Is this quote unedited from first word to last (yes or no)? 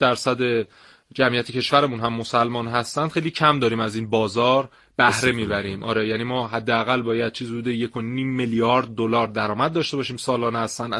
yes